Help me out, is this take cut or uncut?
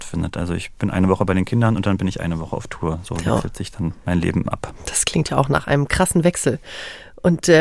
uncut